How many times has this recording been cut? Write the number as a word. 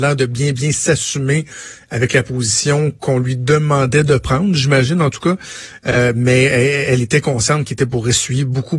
zero